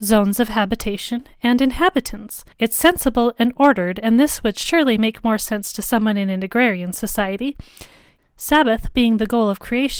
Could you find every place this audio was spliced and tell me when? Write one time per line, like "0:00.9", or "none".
0:02.5
0:08.2